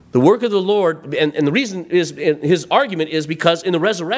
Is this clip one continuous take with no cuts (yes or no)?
yes